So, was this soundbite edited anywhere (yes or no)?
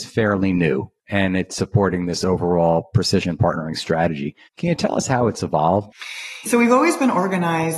yes